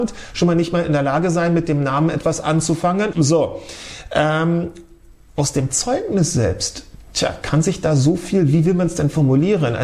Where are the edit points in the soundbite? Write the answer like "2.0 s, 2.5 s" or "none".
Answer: 3.1 s